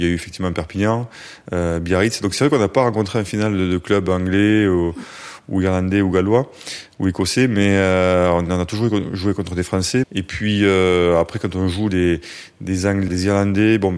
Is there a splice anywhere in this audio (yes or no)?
yes